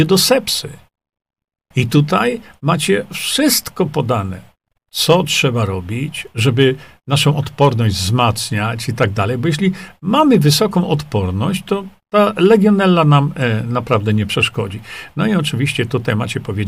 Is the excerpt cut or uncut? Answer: cut